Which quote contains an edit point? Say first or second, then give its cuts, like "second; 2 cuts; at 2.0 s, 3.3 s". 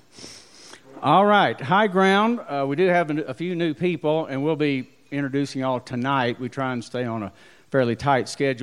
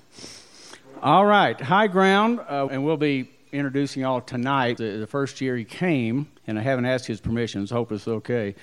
second; 3 cuts; at 2.7 s, 4.8 s, 6.4 s